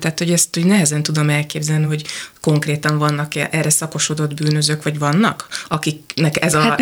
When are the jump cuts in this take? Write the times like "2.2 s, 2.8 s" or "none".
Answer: none